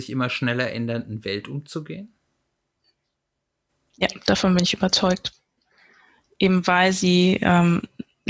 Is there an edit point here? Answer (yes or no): no